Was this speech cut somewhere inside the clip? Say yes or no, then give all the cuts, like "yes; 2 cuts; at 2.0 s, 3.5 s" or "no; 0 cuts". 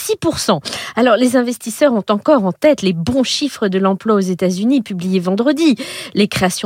no; 0 cuts